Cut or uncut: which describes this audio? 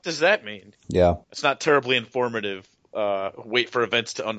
cut